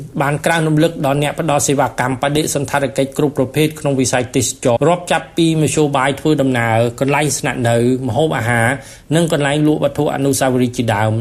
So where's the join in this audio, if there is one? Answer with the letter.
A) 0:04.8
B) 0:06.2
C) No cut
A